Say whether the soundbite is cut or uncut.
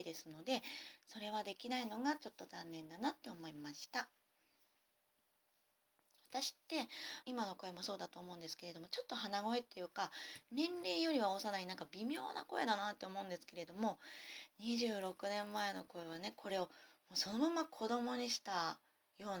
cut